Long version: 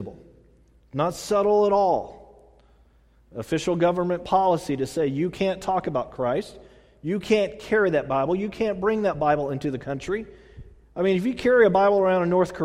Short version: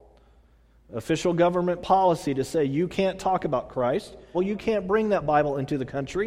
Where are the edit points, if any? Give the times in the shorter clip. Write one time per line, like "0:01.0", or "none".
0:04.3